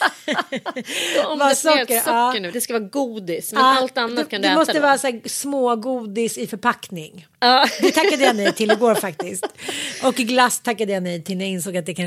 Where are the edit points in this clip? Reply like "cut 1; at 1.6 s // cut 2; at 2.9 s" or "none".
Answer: cut 1; at 2.5 s